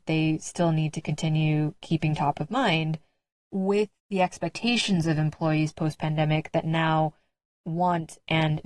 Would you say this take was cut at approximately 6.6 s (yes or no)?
no